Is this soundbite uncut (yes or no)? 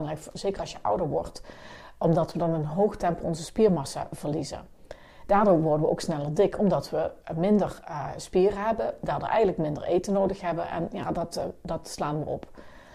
no